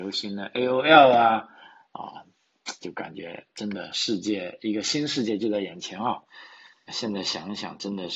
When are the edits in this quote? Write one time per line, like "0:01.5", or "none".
0:02.8
0:06.9